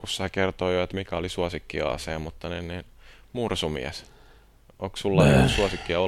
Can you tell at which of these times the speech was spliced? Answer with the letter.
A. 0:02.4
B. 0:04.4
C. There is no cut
C